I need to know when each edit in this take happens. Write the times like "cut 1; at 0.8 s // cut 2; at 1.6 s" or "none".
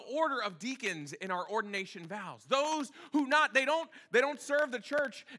none